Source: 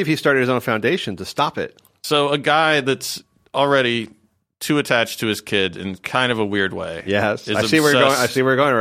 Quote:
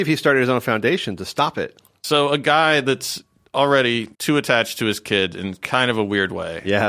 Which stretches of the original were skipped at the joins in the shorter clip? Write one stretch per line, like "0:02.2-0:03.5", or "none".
0:04.1-0:04.6